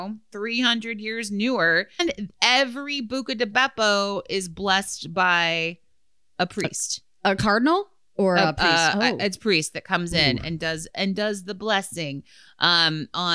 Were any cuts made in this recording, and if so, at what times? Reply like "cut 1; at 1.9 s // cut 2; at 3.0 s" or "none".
cut 1; at 2.0 s